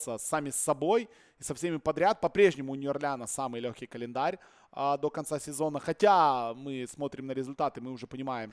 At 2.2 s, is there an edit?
no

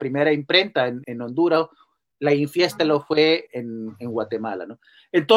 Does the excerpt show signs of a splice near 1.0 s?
yes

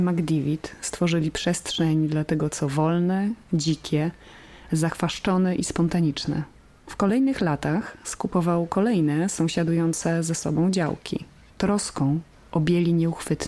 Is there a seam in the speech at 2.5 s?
no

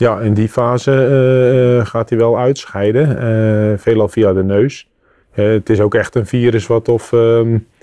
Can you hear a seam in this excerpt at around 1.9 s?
no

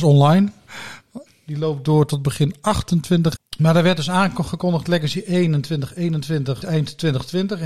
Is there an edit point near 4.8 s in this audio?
no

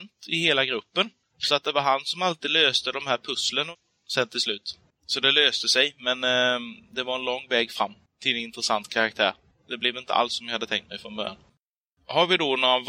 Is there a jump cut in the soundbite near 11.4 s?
no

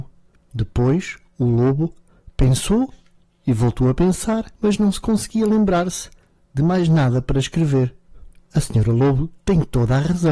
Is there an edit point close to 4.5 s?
yes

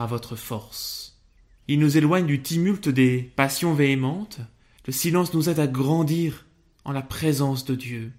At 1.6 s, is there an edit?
yes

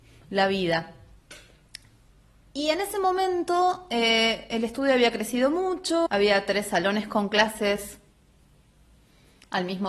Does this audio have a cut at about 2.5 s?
no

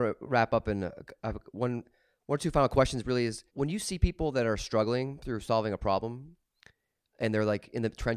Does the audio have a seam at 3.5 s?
yes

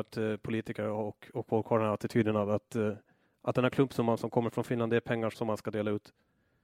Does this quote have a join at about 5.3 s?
yes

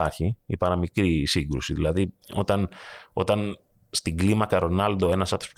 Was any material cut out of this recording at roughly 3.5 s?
no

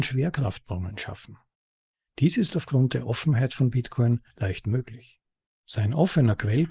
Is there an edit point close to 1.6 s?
no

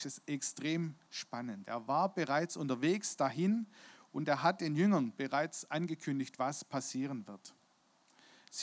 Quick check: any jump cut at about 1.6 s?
yes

